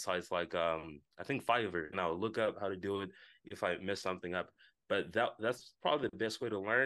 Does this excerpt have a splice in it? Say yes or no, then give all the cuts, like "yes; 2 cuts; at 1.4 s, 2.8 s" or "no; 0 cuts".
yes; 1 cut; at 1.9 s